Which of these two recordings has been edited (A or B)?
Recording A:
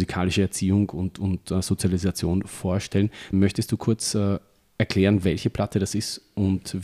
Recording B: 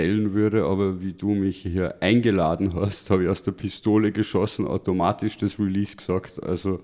A